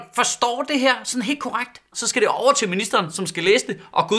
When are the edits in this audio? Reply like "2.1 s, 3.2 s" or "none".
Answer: 1.9 s